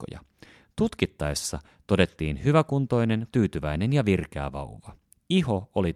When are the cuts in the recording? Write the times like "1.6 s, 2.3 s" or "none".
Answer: 3.3 s